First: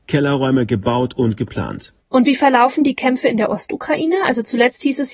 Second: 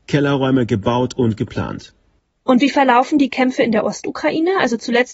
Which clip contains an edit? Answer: first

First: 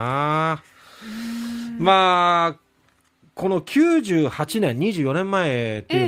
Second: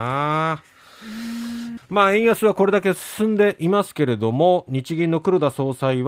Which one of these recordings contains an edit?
second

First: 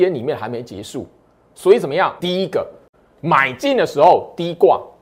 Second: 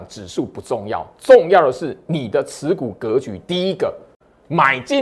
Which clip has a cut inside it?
first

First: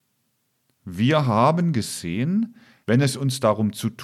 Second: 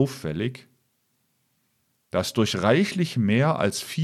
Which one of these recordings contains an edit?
first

